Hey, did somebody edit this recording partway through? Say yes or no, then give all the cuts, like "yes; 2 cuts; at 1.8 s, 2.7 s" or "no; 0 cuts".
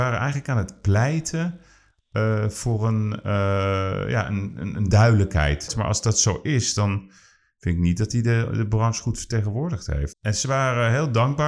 yes; 2 cuts; at 5.7 s, 10.1 s